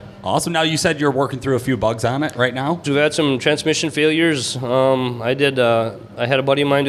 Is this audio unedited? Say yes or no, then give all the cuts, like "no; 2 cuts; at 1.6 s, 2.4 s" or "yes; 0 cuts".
no; 1 cut; at 2.8 s